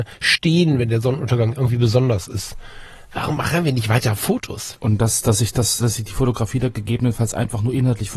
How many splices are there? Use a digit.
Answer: 2